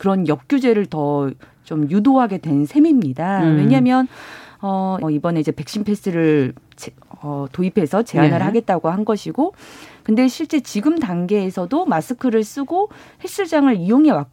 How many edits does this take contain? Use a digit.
1